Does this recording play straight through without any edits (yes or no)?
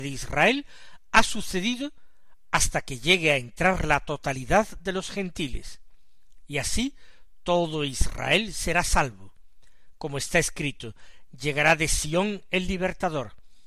yes